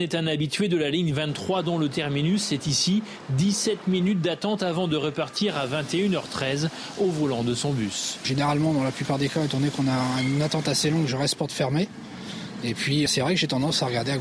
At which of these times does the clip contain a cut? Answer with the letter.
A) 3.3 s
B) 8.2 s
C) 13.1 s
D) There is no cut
C